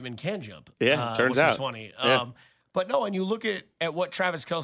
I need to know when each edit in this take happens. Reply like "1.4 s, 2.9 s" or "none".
none